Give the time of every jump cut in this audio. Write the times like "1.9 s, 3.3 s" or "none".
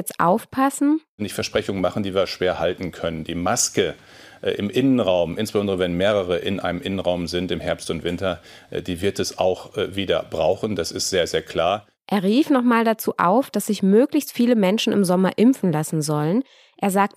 none